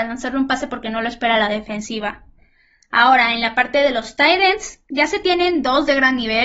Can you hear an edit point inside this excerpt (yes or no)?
no